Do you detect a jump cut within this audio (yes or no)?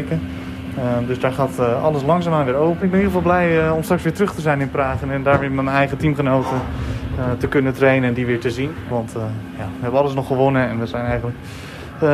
yes